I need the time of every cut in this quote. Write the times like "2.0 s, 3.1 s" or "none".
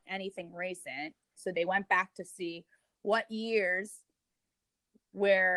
1.4 s